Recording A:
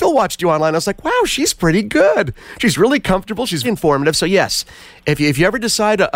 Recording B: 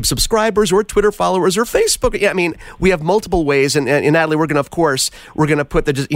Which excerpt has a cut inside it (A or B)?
A